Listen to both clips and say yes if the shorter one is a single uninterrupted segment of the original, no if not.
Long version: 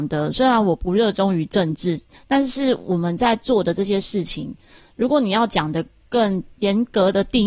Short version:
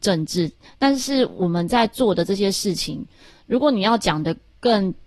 yes